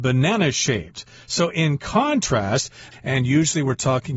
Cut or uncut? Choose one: cut